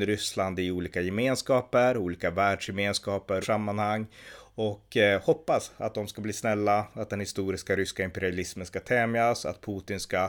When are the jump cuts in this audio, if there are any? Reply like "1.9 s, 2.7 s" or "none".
3.4 s